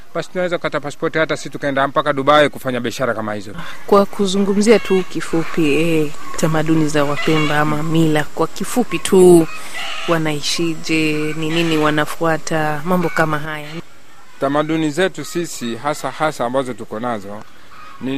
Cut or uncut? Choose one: cut